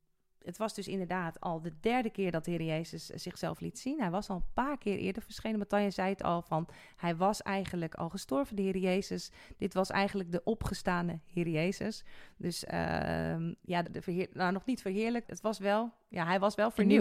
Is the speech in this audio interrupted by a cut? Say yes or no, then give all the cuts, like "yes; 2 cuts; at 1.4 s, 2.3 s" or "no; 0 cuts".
yes; 2 cuts; at 13.8 s, 15.2 s